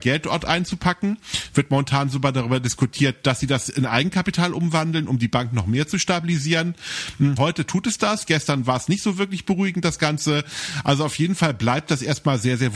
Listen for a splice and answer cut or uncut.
cut